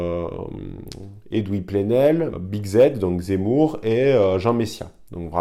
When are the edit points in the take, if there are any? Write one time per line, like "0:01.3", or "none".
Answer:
0:02.3